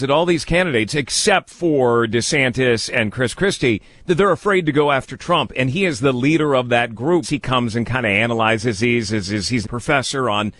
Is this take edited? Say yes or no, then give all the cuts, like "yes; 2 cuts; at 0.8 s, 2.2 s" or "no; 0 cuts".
yes; 2 cuts; at 7.2 s, 9.6 s